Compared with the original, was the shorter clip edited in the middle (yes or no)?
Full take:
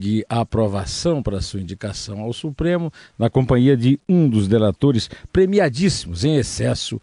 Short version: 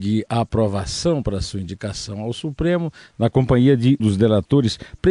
yes